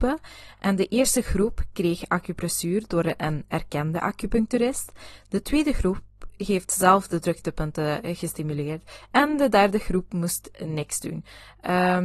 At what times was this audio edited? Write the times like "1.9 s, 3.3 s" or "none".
none